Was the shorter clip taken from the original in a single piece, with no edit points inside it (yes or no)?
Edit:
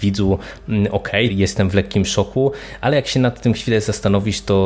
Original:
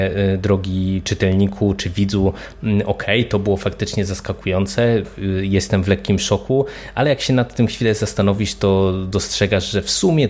no